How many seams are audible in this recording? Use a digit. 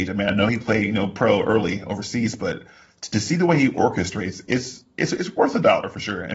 0